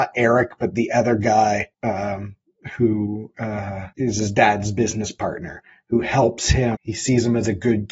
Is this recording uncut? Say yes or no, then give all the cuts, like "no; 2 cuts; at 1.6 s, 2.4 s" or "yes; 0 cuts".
no; 3 cuts; at 1.7 s, 3.9 s, 6.7 s